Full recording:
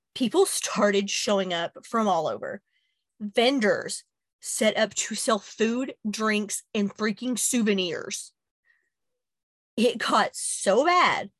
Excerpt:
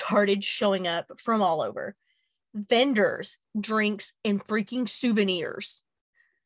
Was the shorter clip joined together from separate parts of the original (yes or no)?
yes